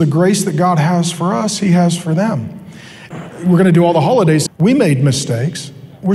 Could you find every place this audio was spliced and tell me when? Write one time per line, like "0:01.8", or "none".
0:03.1
0:04.5

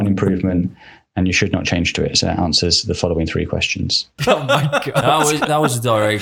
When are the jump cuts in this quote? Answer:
0:04.2

